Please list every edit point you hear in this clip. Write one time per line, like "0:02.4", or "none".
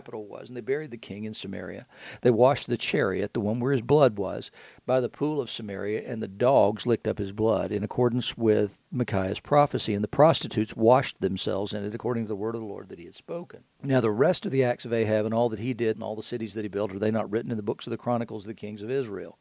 0:13.7
0:15.9